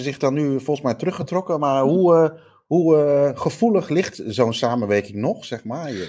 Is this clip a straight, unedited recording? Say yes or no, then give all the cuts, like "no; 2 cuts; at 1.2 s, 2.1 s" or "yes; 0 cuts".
yes; 0 cuts